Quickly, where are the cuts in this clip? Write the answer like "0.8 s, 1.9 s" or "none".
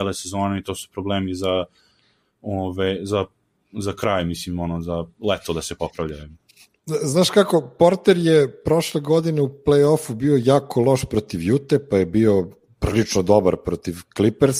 none